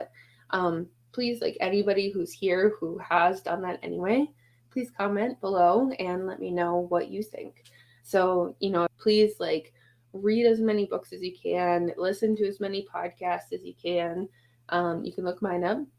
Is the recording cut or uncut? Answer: cut